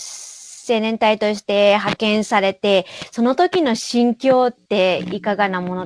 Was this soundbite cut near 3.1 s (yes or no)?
no